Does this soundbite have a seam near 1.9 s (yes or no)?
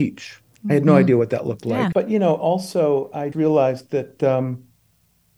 yes